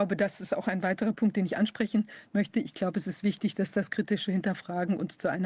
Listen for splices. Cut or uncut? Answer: cut